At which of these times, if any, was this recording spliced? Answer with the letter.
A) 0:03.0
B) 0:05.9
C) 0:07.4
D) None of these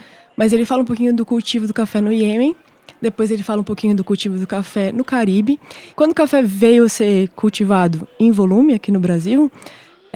B